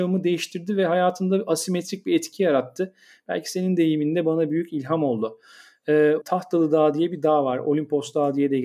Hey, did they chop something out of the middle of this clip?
yes; 1 cut; at 6.2 s

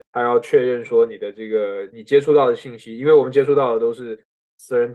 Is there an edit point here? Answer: no; 0 cuts

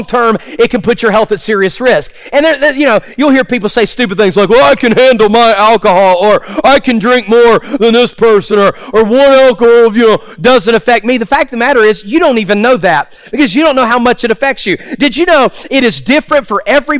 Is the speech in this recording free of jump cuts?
yes; 0 cuts

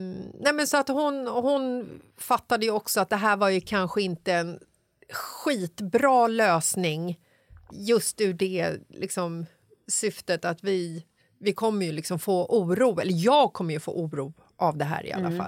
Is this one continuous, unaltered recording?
no; 1 cut; at 7.7 s

